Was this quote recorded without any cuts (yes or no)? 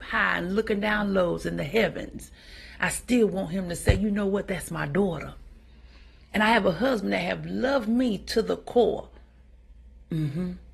yes